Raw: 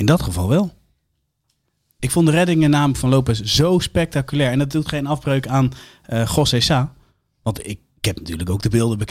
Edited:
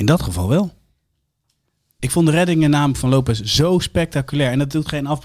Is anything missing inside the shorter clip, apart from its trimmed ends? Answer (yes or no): no